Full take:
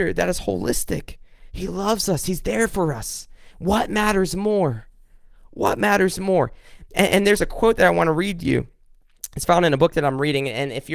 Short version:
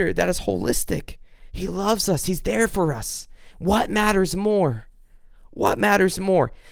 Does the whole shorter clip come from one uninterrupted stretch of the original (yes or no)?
yes